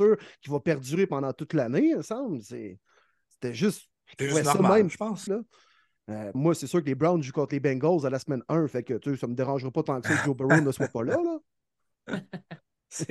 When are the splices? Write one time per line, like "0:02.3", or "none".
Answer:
0:05.3
0:06.3